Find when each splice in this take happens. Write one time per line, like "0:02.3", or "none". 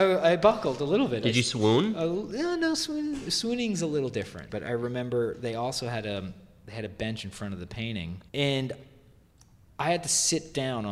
0:04.5
0:08.3